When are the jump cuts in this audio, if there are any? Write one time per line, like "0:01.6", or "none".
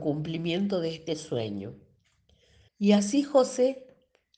0:02.7